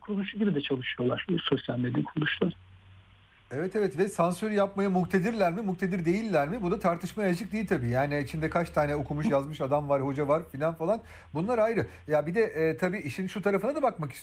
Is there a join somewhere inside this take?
no; 0 cuts

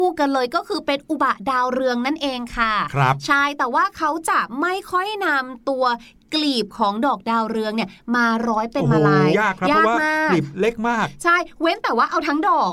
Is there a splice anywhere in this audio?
yes; 1 cut; at 9.3 s

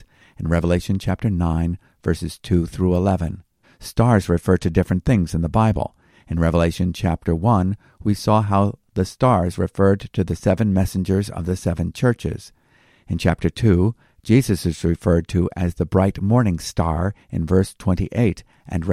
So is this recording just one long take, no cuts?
no; 1 cut; at 3.6 s

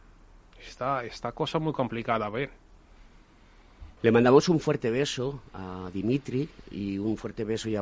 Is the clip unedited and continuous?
no; 1 cut; at 4.0 s

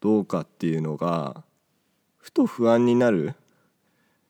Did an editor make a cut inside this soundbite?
no; 0 cuts

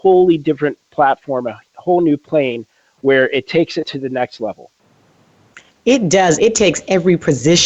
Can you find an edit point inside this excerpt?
yes; 1 cut; at 6.4 s

